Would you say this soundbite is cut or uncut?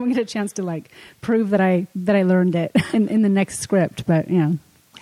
cut